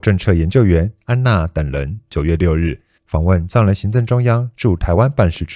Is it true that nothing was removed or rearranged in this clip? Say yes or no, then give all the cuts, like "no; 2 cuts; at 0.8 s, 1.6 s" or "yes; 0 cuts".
yes; 0 cuts